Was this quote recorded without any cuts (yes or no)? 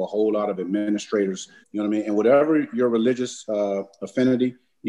no